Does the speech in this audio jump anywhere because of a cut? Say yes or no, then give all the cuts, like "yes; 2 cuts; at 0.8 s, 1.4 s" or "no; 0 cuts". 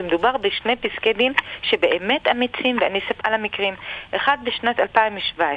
yes; 1 cut; at 3.2 s